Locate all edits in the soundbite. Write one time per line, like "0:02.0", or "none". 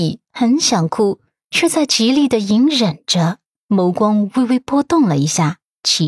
0:03.7